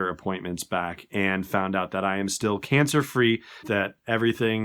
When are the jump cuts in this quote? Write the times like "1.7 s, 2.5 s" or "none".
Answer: 3.6 s

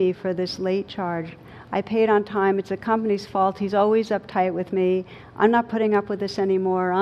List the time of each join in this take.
none

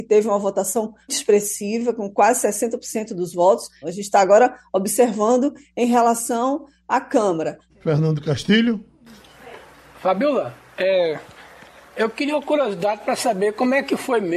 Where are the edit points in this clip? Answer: 1.1 s, 3.8 s, 7.7 s

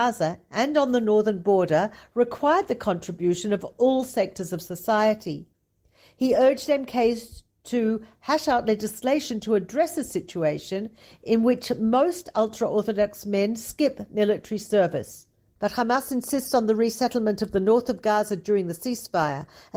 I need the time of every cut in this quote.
15.6 s

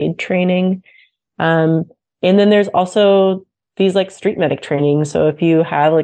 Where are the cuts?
none

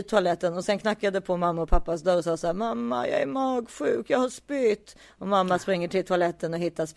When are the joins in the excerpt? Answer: none

